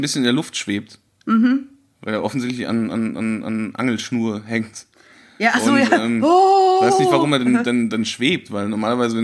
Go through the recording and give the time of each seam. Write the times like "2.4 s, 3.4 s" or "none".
none